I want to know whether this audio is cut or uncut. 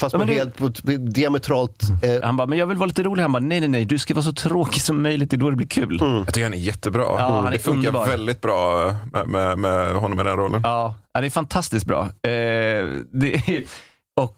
cut